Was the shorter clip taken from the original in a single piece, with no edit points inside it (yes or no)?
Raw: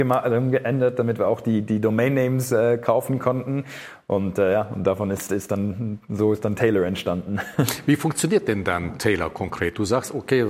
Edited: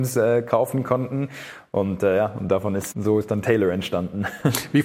no